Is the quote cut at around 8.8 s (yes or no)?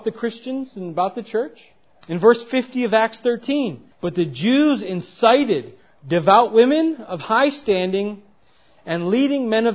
no